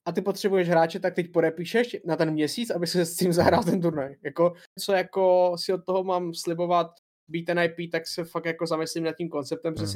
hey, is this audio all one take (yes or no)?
no